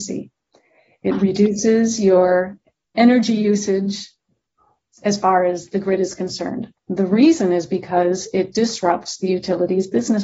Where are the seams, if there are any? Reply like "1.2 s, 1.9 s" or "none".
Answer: 6.8 s